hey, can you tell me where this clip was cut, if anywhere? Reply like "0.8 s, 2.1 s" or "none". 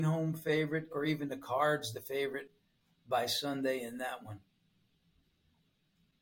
0.9 s